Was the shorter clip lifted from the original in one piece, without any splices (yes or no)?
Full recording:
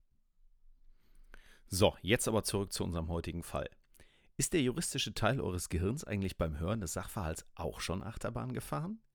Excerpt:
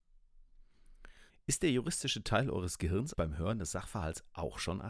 no